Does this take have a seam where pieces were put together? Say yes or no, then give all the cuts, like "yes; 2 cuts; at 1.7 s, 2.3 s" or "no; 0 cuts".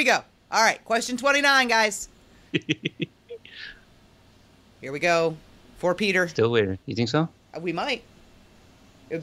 yes; 1 cut; at 6.8 s